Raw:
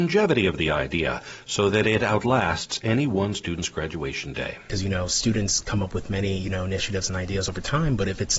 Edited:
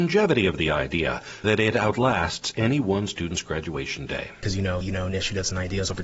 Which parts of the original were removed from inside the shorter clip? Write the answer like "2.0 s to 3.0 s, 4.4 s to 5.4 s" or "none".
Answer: 1.4 s to 1.7 s, 5.1 s to 6.4 s